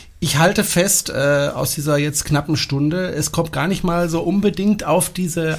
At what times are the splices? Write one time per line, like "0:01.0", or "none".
none